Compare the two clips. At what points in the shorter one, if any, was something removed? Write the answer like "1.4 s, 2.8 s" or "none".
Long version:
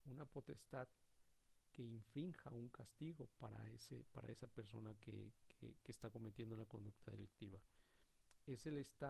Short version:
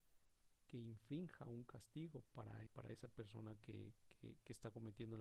2.7 s